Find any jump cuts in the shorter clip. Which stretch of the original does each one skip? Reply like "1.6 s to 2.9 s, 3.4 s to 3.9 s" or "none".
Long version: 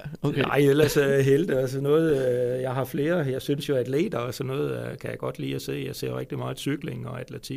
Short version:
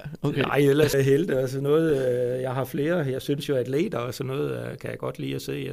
0.9 s to 1.1 s